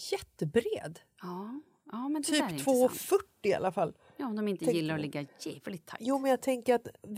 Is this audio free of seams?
yes; 0 cuts

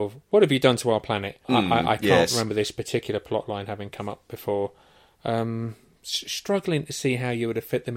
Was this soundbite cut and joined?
no; 0 cuts

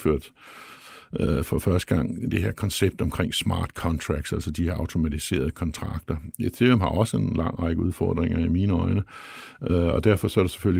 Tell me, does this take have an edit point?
no; 0 cuts

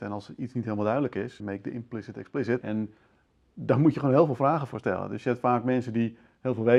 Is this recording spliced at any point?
yes; 2 cuts; at 1.4 s, 2.6 s

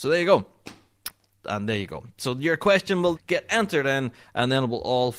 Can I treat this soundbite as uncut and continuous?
no; 2 cuts; at 1.3 s, 3.2 s

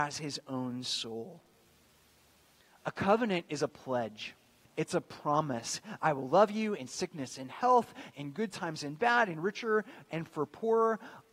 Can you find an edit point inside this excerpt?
yes; 2 cuts; at 4.6 s, 6.0 s

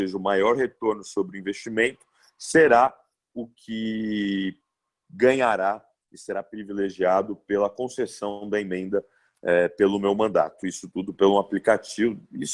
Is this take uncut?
yes; 0 cuts

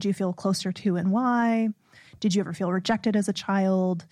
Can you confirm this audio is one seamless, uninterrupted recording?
yes; 0 cuts

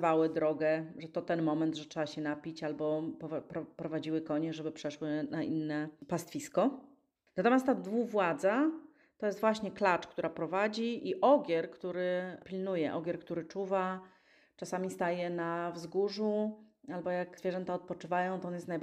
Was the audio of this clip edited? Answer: no; 0 cuts

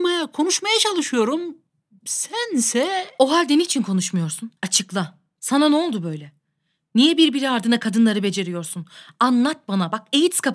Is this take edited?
yes; 1 cut; at 4.6 s

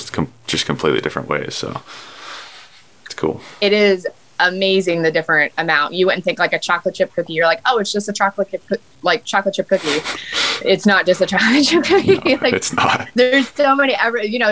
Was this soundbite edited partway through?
no; 0 cuts

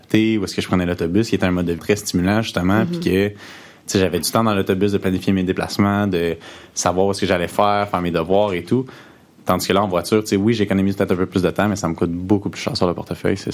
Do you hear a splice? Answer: yes; 1 cut; at 1.8 s

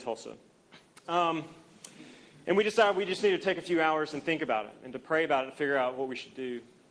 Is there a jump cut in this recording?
yes; 1 cut; at 1.0 s

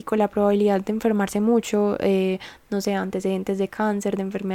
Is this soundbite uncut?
yes; 0 cuts

